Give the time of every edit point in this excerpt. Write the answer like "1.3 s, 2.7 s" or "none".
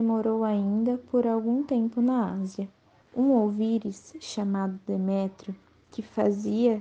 3.0 s